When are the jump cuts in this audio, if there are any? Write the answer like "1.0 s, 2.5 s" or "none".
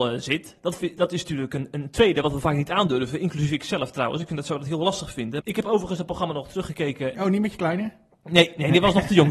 5.4 s, 7.1 s